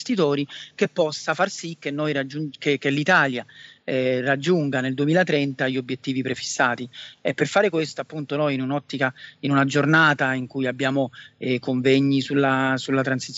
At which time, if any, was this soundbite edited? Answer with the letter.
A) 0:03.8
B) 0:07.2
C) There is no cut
C